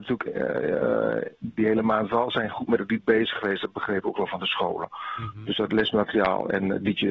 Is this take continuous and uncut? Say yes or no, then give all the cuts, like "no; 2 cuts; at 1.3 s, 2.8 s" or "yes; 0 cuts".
yes; 0 cuts